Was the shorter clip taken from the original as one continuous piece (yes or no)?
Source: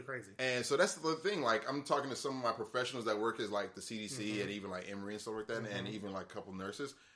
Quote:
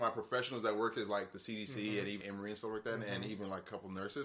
no